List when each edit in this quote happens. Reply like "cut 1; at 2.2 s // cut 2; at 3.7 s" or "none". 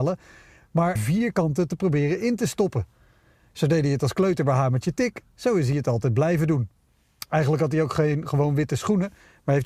cut 1; at 1.0 s